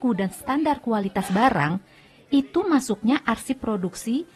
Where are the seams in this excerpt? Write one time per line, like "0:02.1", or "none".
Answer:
none